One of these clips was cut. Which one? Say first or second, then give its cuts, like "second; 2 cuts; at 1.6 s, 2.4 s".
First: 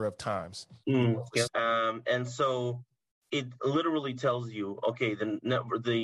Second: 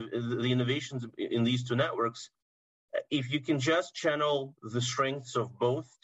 first; 1 cut; at 1.5 s